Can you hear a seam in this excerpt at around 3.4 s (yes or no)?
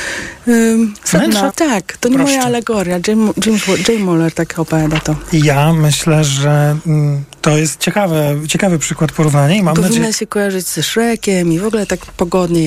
no